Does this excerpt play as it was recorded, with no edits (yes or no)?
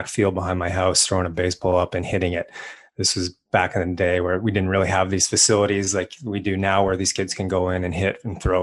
yes